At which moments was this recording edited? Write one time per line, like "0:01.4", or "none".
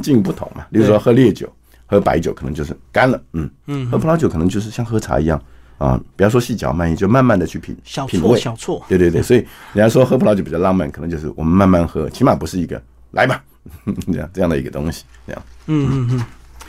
0:02.8

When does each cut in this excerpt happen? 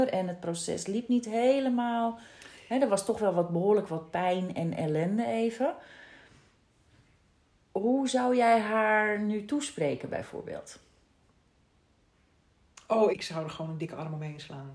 0:13.1

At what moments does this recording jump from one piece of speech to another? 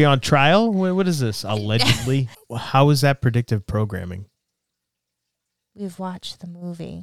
0:02.3

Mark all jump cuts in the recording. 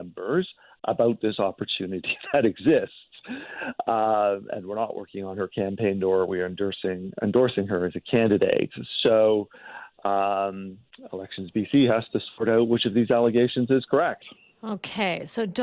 none

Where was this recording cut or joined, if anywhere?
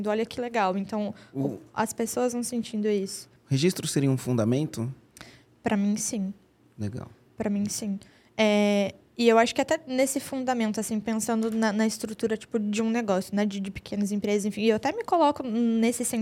none

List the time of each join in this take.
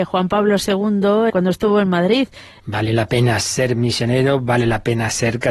0:01.3
0:02.6

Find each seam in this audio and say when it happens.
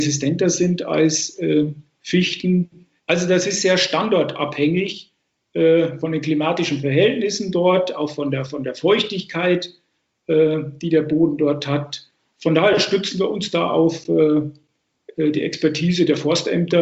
0:03.0

